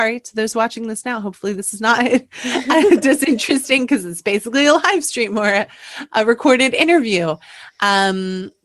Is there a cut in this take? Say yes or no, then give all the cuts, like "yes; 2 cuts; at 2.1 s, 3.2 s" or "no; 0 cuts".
no; 0 cuts